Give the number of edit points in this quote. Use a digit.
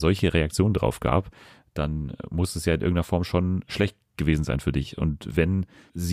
0